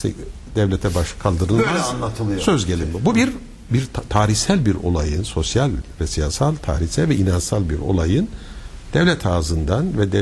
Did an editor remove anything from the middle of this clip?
no; 0 cuts

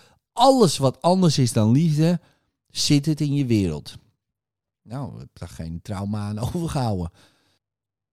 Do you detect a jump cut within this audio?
yes; 1 cut; at 4.8 s

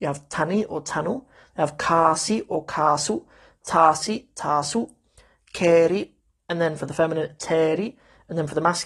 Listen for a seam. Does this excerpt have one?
no; 0 cuts

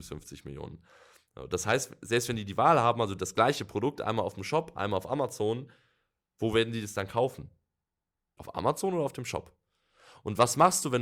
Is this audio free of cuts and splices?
no; 1 cut; at 8.4 s

